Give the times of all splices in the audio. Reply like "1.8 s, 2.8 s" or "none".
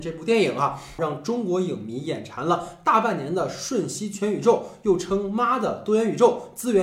1.0 s